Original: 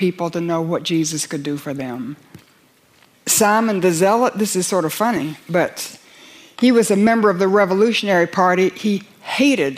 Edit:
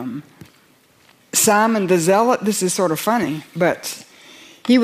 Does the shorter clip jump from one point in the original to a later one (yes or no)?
no